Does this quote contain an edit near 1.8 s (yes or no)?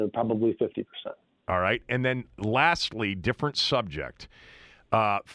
no